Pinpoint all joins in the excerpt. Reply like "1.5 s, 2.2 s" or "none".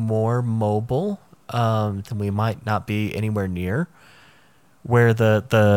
2.0 s